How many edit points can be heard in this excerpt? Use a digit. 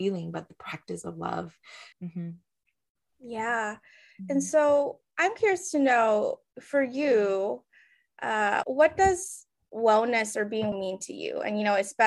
3